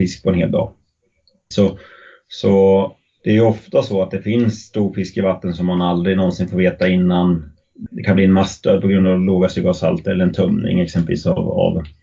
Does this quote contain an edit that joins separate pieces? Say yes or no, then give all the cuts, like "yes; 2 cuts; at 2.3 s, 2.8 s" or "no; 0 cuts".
yes; 2 cuts; at 1.5 s, 7.9 s